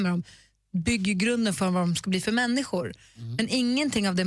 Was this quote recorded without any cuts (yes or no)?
yes